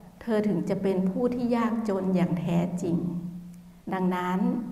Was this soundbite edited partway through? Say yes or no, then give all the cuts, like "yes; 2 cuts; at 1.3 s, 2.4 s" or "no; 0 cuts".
yes; 1 cut; at 3.8 s